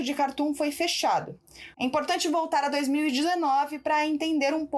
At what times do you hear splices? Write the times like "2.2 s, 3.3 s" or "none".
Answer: 1.7 s